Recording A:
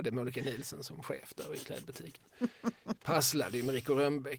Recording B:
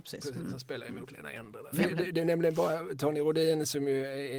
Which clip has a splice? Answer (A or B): B